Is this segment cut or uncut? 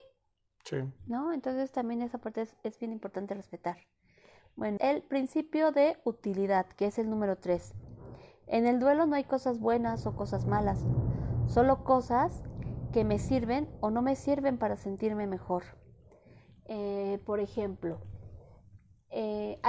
cut